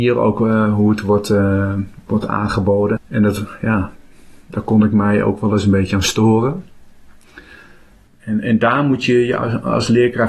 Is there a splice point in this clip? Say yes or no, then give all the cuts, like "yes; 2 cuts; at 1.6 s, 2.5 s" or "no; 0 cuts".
yes; 2 cuts; at 3.0 s, 8.1 s